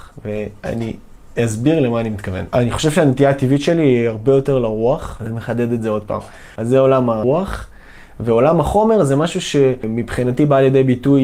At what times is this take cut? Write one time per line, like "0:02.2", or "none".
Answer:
0:05.2